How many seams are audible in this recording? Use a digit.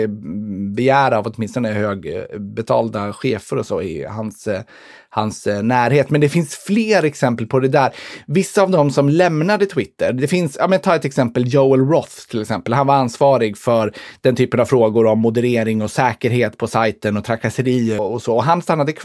1